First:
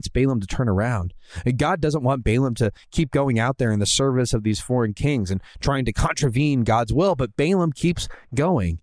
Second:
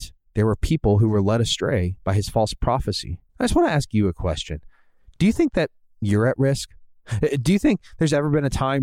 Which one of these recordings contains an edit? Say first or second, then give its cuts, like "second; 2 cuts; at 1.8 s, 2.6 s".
second; 1 cut; at 3.3 s